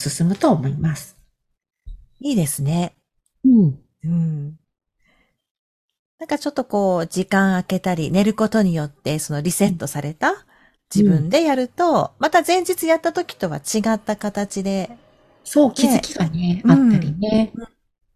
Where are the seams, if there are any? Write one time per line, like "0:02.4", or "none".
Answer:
none